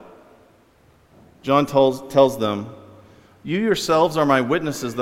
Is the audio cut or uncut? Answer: uncut